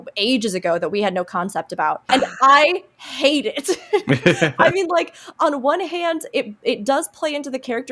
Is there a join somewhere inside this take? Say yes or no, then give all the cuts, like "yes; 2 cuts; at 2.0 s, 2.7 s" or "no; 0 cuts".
yes; 1 cut; at 2.1 s